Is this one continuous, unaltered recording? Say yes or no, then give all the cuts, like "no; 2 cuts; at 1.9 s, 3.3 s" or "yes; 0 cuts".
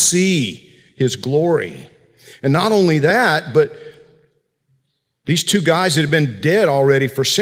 yes; 0 cuts